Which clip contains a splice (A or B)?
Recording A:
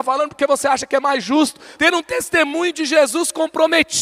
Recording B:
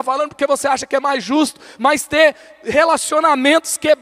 A